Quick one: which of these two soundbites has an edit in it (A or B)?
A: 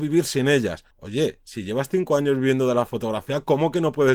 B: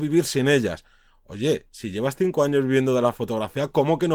A